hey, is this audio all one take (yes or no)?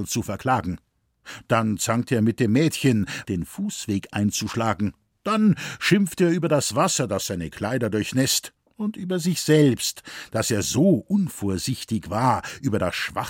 no